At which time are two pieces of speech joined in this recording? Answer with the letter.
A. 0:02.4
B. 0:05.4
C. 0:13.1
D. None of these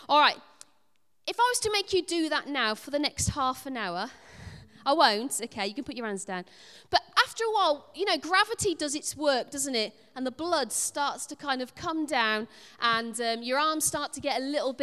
D